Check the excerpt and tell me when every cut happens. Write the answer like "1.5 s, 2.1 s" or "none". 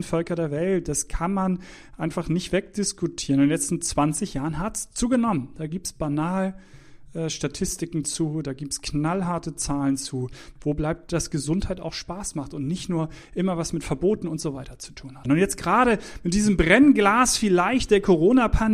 10.6 s, 15.2 s

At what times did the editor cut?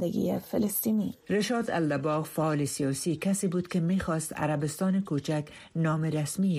1.2 s

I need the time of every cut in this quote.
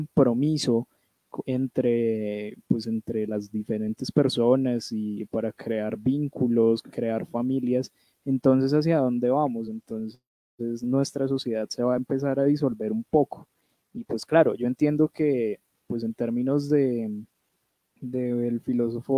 none

